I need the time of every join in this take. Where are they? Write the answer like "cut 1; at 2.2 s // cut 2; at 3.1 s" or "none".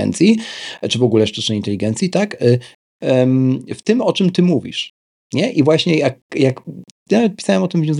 cut 1; at 3.0 s